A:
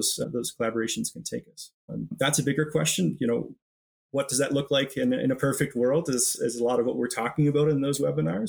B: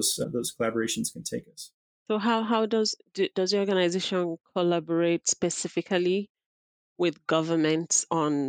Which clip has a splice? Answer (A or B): A